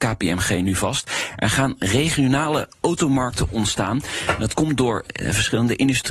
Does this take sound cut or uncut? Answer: uncut